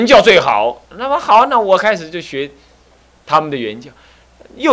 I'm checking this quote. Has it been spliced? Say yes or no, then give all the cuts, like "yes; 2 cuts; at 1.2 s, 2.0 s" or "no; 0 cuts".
no; 0 cuts